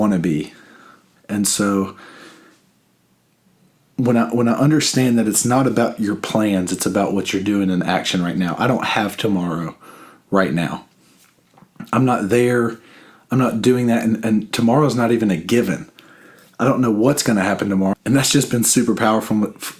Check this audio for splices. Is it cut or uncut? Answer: cut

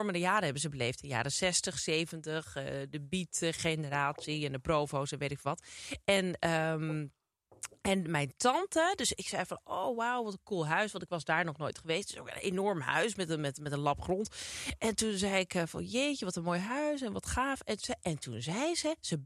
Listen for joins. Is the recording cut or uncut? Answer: uncut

